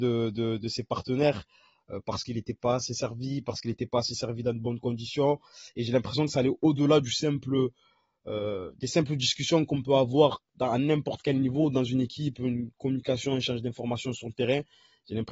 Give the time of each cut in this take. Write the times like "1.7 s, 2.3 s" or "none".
none